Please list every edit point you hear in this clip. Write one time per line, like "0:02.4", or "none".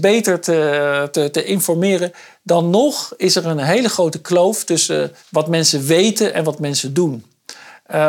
0:05.2